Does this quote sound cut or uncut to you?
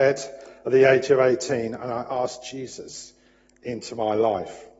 uncut